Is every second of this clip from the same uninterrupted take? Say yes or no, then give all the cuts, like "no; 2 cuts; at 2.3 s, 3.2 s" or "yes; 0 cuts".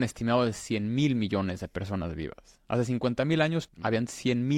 no; 1 cut; at 3.7 s